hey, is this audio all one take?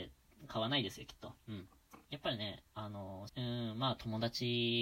no; 2 cuts; at 2.0 s, 3.3 s

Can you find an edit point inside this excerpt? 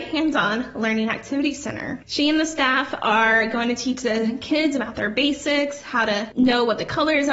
no; 0 cuts

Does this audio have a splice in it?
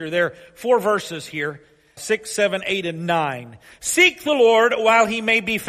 yes; 1 cut; at 2.0 s

